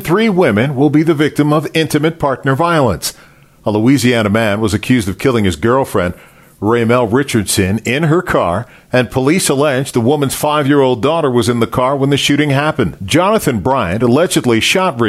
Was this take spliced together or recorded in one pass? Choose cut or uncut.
uncut